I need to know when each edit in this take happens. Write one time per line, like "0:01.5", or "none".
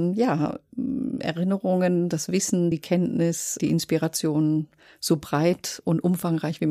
none